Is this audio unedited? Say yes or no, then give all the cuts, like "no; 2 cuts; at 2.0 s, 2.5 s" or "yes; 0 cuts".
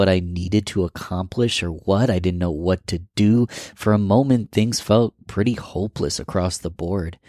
yes; 0 cuts